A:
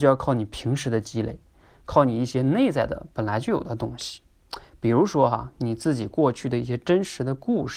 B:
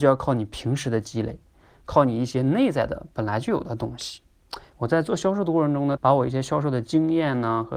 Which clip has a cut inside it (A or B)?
B